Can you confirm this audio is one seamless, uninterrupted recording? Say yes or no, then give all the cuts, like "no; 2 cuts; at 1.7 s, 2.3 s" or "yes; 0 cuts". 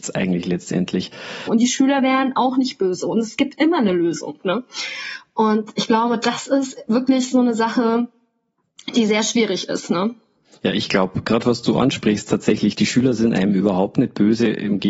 no; 1 cut; at 1.5 s